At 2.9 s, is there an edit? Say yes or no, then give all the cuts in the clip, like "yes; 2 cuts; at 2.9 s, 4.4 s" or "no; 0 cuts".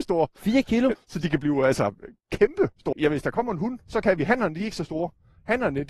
yes; 2 cuts; at 0.9 s, 2.9 s